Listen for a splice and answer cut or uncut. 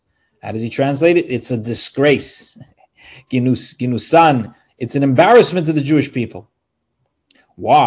uncut